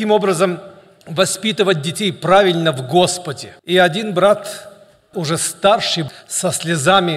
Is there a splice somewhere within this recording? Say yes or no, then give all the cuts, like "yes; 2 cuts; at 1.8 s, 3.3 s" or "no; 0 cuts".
yes; 1 cut; at 3.6 s